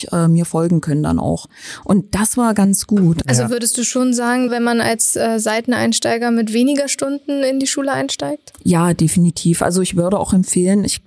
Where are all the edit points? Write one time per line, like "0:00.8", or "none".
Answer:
0:04.5